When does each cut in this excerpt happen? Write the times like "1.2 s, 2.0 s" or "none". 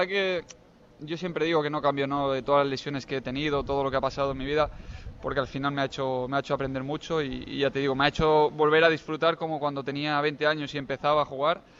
none